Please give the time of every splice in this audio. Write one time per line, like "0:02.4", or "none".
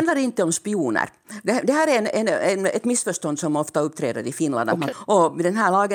0:04.9